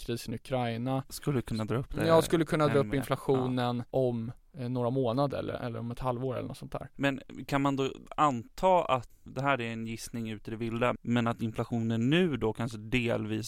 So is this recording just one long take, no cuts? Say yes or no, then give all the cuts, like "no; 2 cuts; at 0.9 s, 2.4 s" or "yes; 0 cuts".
yes; 0 cuts